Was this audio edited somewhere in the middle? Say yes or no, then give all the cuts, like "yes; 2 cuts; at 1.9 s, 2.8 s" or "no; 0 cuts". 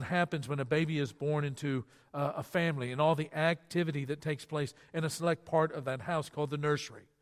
no; 0 cuts